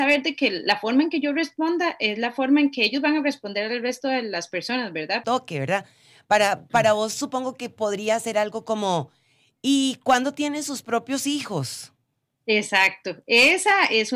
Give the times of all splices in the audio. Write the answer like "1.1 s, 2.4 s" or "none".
5.2 s